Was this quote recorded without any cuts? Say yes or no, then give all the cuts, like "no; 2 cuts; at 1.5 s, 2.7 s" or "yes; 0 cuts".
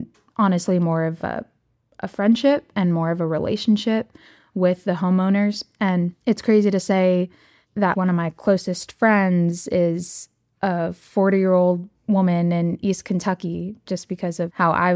yes; 0 cuts